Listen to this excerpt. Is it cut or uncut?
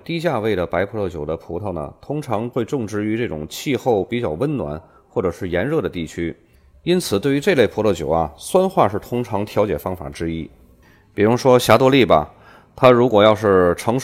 uncut